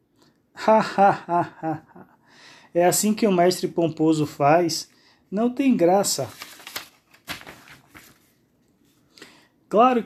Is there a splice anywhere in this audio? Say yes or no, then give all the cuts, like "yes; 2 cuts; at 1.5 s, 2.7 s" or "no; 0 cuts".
no; 0 cuts